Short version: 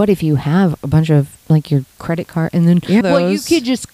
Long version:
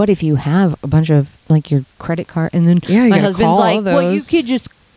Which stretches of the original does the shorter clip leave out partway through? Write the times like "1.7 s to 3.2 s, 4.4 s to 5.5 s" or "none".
3.0 s to 3.8 s